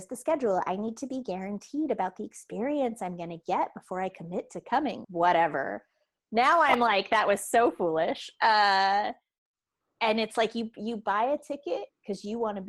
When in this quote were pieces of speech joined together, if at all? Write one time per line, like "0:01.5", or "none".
0:05.0